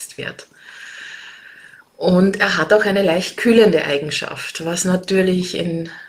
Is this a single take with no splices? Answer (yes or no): yes